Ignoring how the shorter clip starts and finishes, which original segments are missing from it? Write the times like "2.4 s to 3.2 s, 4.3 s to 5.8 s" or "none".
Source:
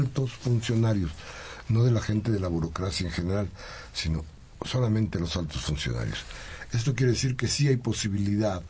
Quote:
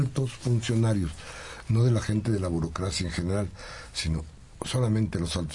none